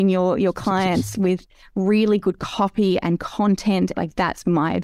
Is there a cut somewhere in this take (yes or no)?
yes